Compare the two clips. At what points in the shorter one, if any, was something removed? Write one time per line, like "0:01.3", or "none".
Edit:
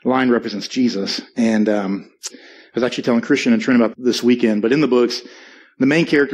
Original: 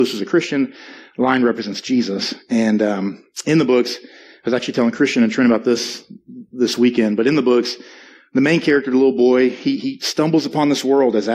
0:02.3
0:03.9